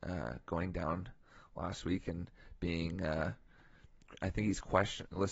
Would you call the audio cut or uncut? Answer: uncut